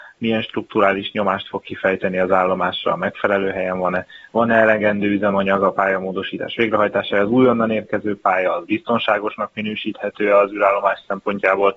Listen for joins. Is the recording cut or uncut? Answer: uncut